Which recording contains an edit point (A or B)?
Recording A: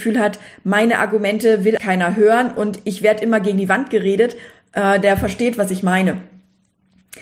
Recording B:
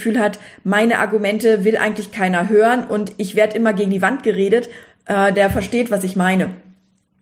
A